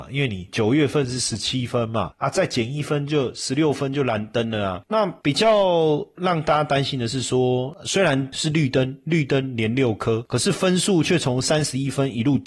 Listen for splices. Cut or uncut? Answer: cut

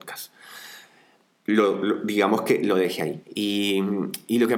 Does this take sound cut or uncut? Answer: cut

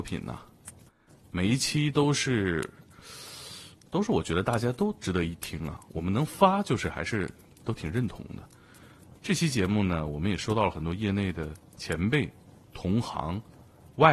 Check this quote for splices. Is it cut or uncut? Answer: cut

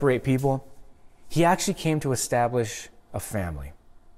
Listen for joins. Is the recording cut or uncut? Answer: uncut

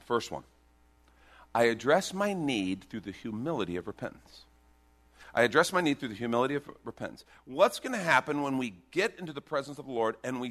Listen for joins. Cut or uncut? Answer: uncut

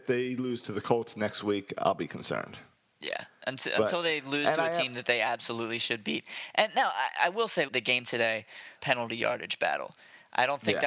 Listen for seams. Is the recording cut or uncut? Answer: cut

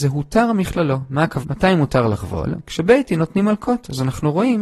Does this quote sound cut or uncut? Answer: cut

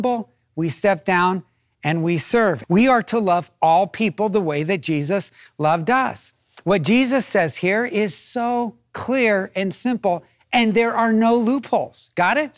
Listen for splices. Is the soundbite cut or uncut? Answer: cut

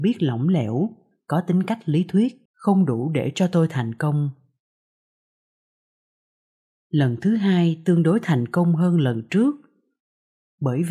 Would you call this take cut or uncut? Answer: cut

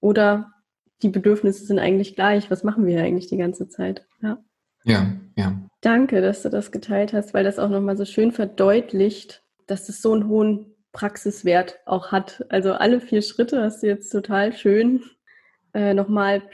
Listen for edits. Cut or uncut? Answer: cut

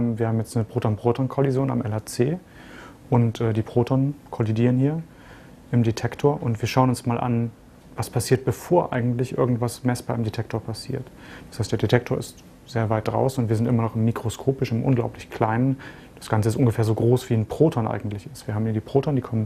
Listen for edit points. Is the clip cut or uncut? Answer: uncut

